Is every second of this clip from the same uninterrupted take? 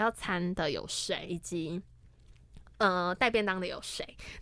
no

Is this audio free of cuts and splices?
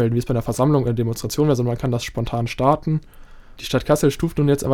no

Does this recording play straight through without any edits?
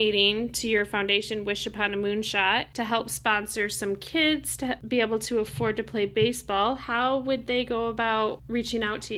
yes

